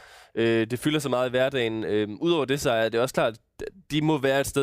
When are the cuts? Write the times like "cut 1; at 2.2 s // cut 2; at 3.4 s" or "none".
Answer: none